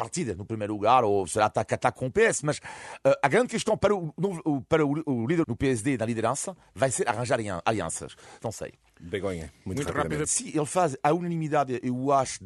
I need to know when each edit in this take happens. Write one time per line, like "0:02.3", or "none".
0:05.4
0:08.4
0:10.2